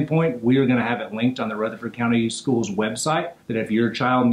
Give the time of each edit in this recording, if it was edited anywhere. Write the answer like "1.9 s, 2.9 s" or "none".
3.4 s